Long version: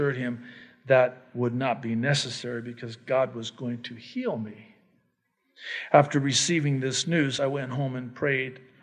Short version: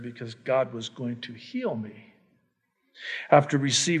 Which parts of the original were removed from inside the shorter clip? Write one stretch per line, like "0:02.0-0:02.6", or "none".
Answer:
none

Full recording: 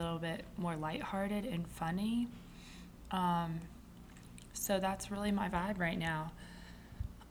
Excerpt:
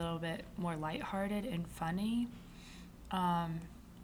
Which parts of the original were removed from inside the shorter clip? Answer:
none

